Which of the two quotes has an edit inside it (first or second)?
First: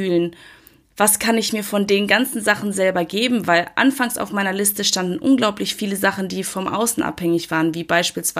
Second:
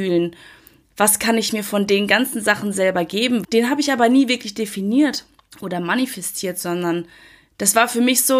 second